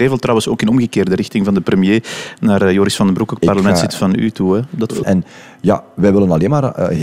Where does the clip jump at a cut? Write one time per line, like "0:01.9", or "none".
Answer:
0:05.0